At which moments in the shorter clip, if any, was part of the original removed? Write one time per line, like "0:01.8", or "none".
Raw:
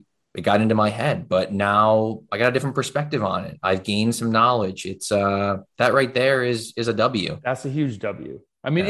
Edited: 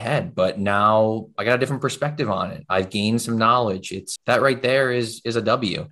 0:04.2